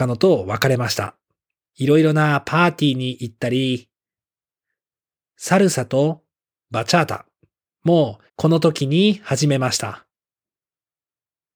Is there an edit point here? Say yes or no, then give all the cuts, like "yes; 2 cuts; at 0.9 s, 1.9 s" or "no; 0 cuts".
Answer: yes; 2 cuts; at 1.6 s, 8.3 s